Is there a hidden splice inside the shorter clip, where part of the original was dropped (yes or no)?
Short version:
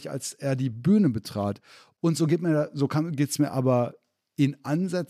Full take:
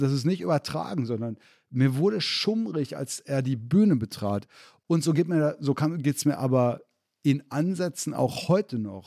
no